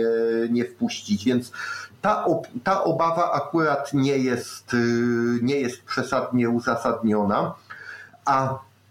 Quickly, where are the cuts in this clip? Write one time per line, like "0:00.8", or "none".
none